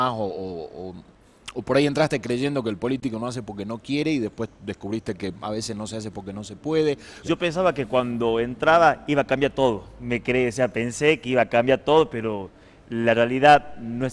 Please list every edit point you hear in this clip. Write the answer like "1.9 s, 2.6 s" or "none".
7.2 s

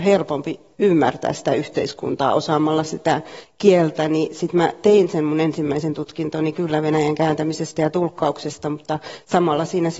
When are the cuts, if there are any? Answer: none

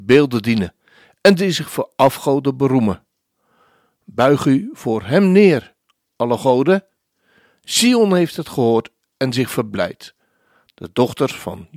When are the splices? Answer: none

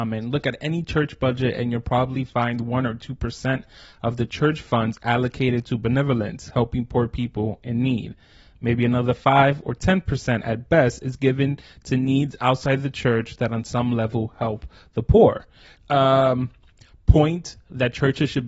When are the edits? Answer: 15.8 s

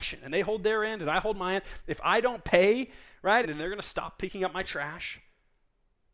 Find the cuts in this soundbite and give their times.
3.4 s

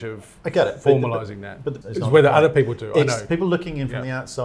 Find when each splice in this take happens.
1.8 s

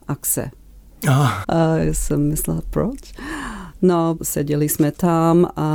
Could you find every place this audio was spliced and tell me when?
1.4 s, 4.2 s

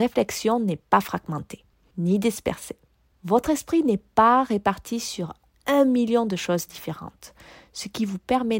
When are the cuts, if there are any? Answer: none

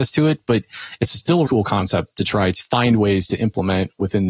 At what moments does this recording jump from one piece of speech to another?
1.5 s, 2.6 s

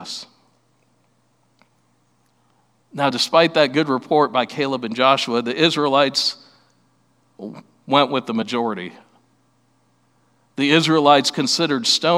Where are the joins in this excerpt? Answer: none

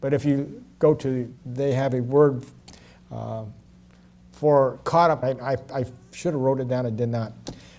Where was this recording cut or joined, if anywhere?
1.4 s, 5.2 s

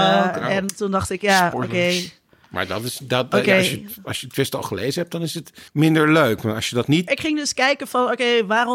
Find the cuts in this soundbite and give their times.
5.7 s, 7.1 s

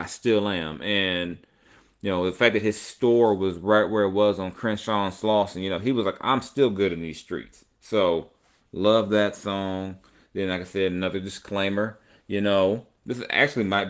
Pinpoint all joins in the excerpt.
none

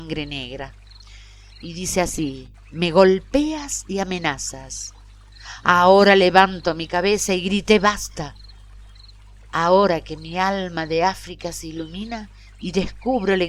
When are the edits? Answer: 9.5 s

